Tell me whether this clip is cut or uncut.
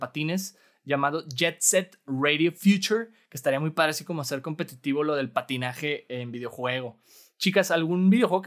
uncut